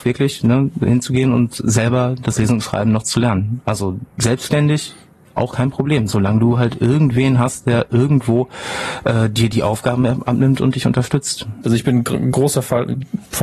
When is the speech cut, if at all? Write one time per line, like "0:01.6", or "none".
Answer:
0:11.6